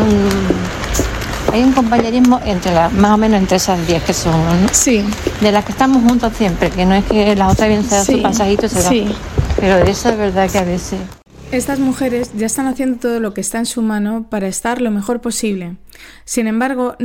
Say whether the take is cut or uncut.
uncut